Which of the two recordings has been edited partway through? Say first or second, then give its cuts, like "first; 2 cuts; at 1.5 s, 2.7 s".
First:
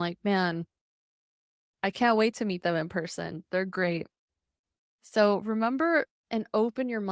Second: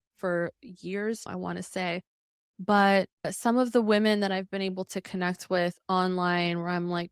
second; 2 cuts; at 1.3 s, 3.2 s